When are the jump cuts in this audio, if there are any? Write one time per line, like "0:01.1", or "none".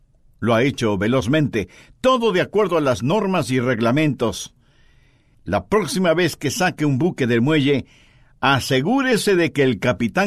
0:05.3